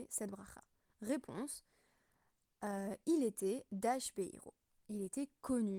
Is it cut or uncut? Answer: uncut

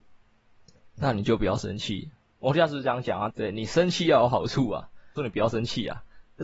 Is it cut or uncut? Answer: cut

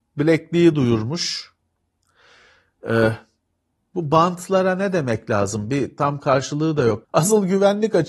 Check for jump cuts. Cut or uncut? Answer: cut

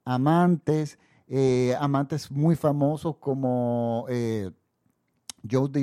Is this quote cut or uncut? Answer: uncut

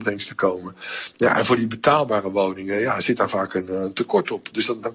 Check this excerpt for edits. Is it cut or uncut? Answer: uncut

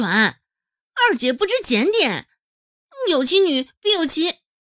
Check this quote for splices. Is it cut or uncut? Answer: uncut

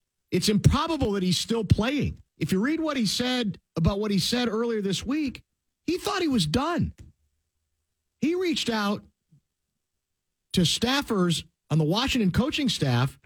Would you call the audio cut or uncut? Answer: cut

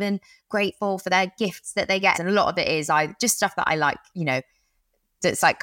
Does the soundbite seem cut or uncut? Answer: cut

